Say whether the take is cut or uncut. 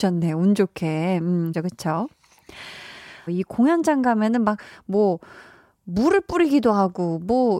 cut